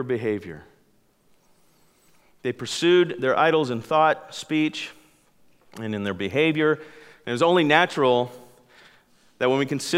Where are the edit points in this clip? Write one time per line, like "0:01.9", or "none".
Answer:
none

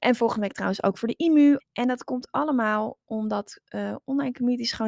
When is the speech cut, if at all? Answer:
0:01.6

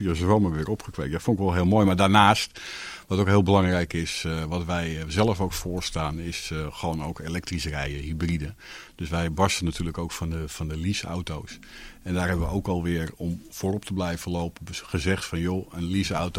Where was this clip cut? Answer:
none

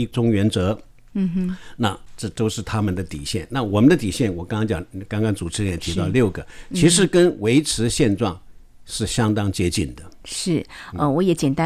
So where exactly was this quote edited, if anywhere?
none

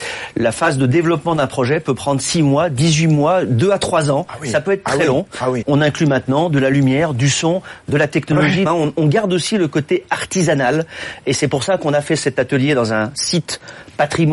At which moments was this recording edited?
0:05.6
0:08.7

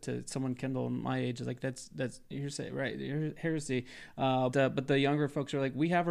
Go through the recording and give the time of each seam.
0:04.5

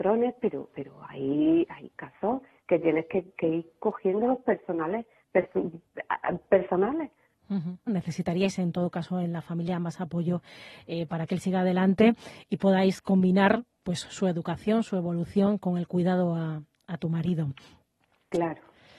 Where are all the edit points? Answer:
0:07.9

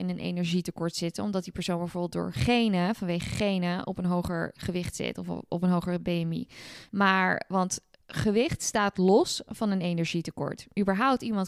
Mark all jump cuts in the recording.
0:06.9

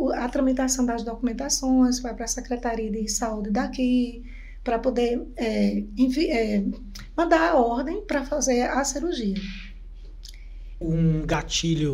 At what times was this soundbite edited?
0:10.8

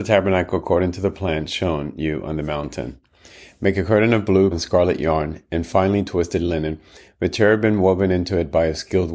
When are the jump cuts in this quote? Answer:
0:04.5

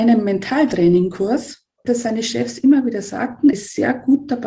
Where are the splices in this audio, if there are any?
0:01.8
0:03.5

